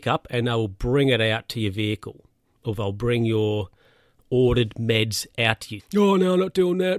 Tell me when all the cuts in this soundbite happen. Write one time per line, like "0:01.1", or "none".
0:05.8